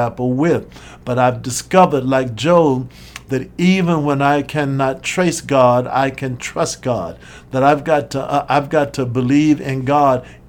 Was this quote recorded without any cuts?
yes; 0 cuts

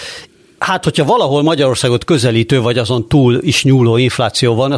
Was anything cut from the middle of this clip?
no; 0 cuts

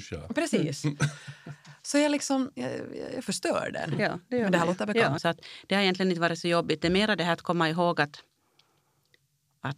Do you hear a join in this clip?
yes; 1 cut; at 5.2 s

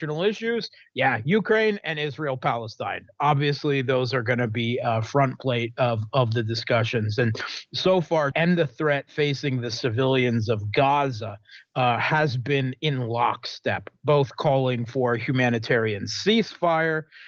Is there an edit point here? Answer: yes; 1 cut; at 8.3 s

